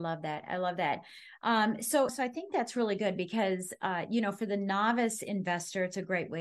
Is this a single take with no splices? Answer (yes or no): no